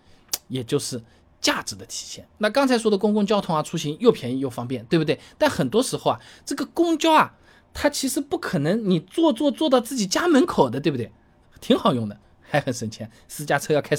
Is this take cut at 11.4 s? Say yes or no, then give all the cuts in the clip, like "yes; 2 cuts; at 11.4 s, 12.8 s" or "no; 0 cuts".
yes; 2 cuts; at 9.5 s, 11.4 s